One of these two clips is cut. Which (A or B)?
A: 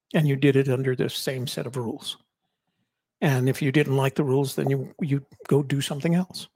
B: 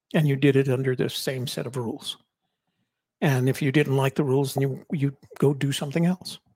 B